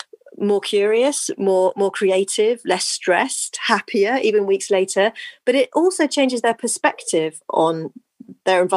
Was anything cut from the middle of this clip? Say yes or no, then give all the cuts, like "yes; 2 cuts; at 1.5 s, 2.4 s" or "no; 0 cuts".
no; 0 cuts